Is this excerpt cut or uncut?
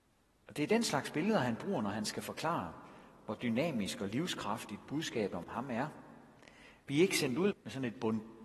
cut